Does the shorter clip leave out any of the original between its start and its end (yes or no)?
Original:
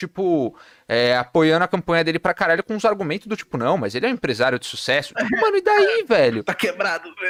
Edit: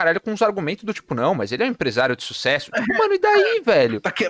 no